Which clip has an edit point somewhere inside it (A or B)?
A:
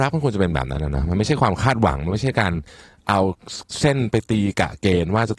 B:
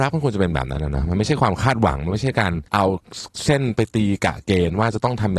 B